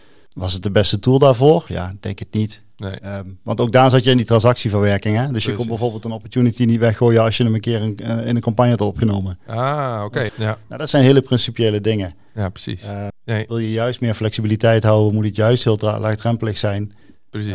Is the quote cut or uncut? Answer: cut